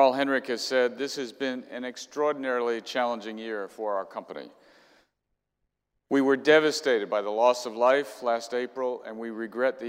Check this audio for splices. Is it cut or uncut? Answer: uncut